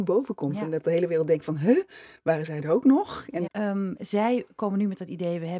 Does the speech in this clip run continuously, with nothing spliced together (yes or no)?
no